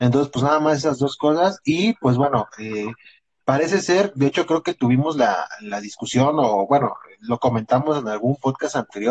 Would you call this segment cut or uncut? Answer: uncut